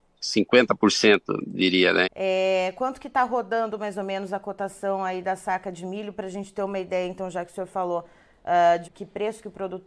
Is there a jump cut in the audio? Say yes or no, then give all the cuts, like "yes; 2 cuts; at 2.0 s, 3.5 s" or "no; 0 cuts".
yes; 2 cuts; at 2.0 s, 8.8 s